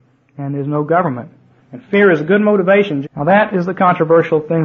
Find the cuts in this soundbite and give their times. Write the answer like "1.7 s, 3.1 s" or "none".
1.6 s, 3.0 s